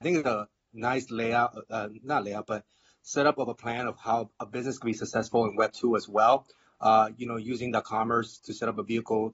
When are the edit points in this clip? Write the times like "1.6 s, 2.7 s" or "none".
none